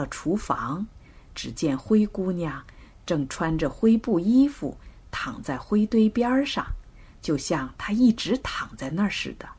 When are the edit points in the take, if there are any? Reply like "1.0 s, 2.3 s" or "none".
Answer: none